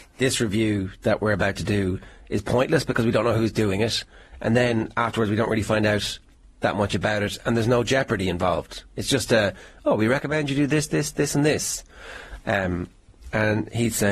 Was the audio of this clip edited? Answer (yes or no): no